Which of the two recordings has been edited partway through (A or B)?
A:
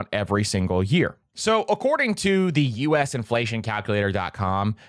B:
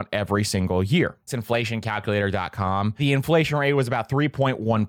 B